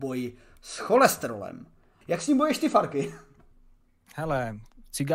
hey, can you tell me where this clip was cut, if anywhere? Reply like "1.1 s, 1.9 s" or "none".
2.0 s